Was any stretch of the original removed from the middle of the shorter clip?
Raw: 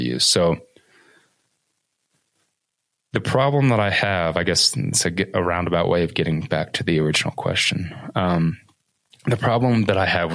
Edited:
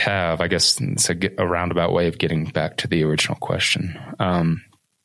no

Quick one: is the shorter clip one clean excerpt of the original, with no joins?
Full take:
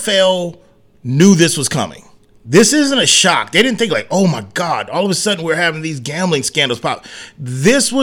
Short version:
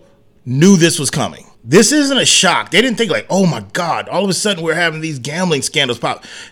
no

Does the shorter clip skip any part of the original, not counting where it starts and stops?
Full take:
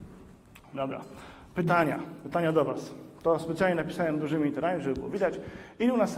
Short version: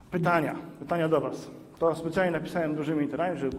no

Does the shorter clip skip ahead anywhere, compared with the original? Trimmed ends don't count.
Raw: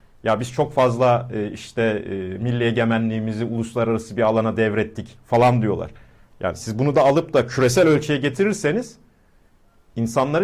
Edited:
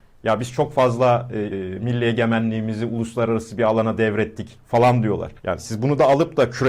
yes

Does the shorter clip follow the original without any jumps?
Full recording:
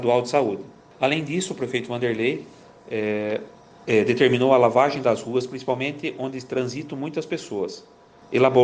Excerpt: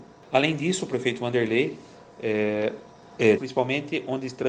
no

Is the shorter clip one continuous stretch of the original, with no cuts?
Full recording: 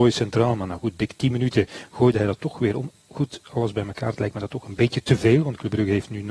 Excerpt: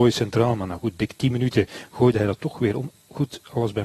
yes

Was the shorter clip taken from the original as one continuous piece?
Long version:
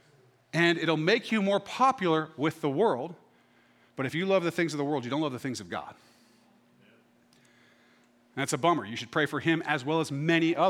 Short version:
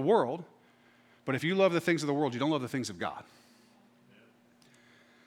yes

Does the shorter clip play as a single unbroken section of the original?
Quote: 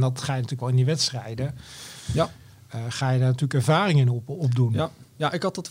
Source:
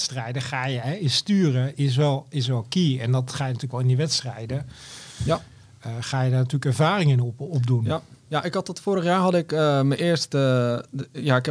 yes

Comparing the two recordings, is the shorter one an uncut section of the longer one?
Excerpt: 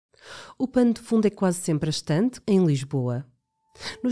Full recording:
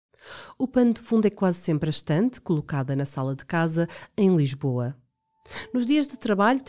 no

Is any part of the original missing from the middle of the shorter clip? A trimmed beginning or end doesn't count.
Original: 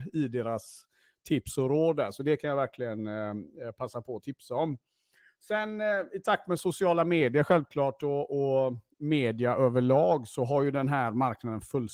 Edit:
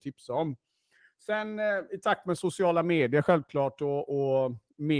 no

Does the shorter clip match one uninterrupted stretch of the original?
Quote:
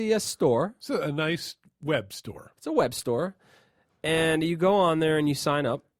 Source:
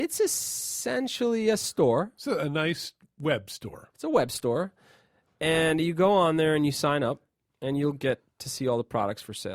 yes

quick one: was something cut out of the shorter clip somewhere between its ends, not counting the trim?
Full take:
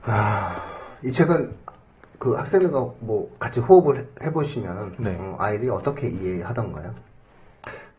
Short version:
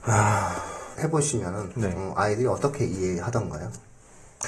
yes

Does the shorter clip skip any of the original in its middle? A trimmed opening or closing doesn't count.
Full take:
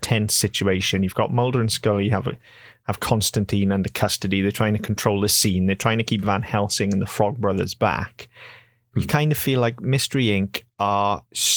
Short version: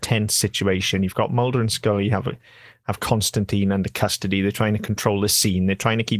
no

